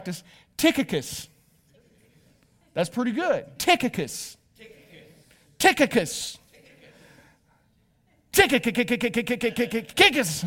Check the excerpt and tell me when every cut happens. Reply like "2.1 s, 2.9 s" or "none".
3.6 s